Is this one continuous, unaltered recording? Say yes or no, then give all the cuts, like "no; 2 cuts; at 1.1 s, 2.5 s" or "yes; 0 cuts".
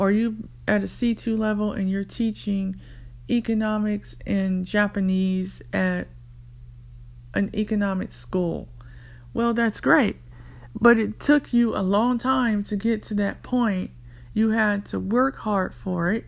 no; 1 cut; at 14.3 s